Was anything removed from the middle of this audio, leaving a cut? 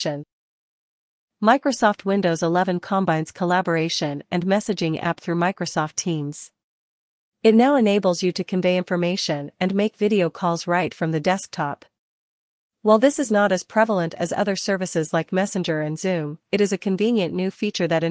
no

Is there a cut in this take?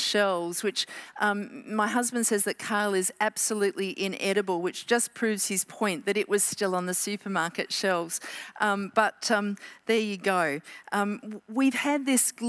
no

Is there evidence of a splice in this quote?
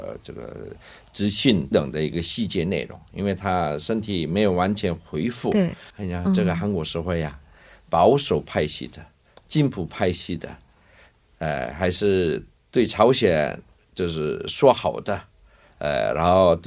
yes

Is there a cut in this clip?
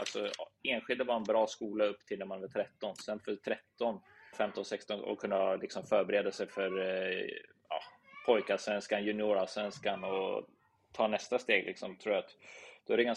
yes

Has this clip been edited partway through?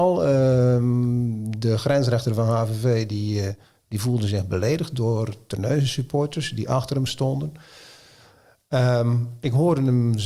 no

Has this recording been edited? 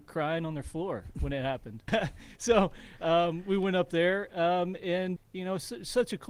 yes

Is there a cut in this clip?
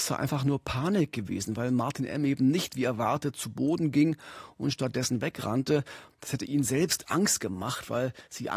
no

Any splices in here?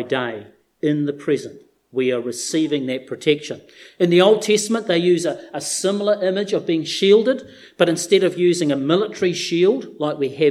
no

